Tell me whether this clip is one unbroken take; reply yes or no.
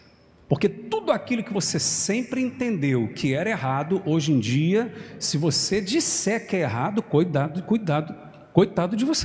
yes